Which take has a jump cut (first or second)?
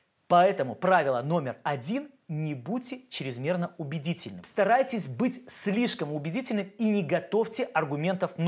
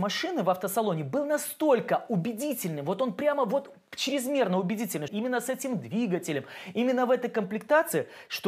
second